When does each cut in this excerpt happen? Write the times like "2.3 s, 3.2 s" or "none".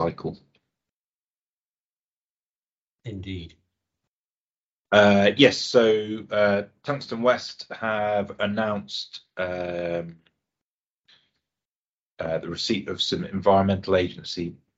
none